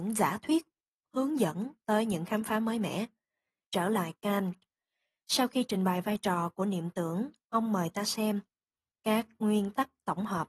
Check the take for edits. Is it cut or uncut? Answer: cut